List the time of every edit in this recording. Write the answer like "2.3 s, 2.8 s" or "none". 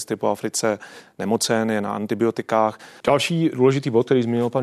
3.0 s